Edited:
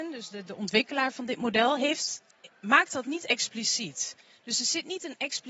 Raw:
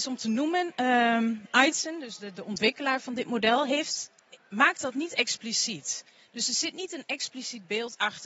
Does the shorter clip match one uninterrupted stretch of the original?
yes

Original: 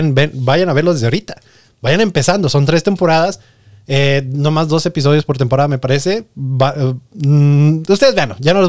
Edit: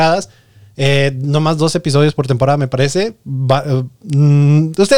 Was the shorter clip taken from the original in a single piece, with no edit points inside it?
yes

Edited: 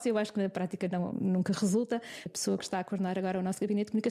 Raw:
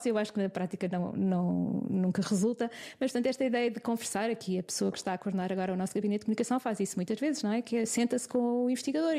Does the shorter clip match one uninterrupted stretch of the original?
no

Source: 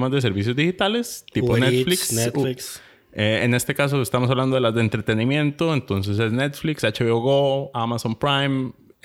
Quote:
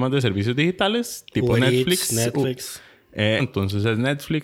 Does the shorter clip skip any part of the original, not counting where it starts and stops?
yes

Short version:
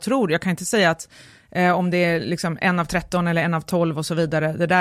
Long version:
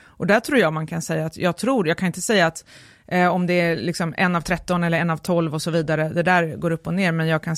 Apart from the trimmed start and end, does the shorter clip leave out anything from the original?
no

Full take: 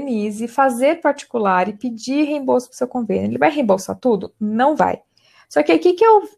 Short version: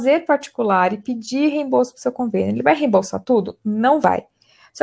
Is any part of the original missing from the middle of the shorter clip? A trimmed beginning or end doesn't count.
no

